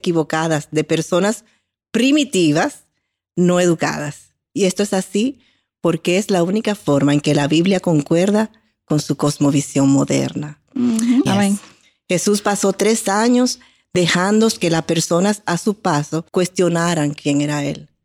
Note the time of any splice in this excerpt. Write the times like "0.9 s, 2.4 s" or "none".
11.3 s, 16.3 s